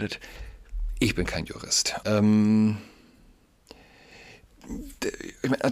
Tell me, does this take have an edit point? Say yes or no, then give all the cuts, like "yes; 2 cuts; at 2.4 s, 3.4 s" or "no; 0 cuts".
yes; 1 cut; at 2.0 s